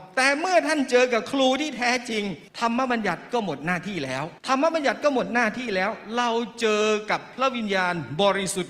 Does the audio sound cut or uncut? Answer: cut